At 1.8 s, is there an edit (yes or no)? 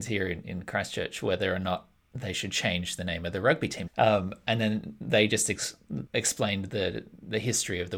no